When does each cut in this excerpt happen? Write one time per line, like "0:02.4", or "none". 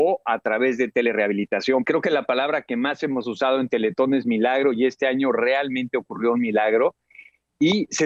0:01.8